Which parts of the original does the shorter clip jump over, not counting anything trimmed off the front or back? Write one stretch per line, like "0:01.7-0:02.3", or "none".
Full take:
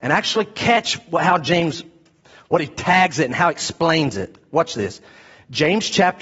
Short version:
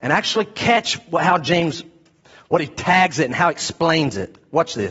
none